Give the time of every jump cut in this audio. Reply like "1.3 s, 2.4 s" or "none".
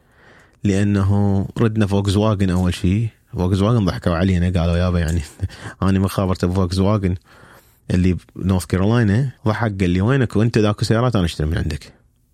9.4 s